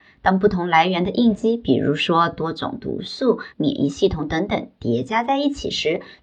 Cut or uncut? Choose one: cut